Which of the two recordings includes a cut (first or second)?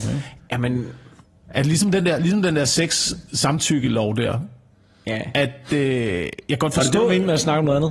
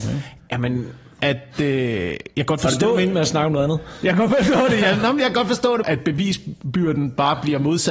second